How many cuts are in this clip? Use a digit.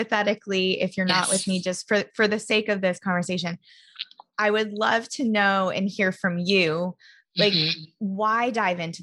0